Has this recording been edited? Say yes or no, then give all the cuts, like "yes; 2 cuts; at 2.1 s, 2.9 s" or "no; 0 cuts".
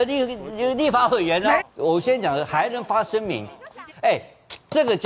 yes; 2 cuts; at 1.6 s, 3.9 s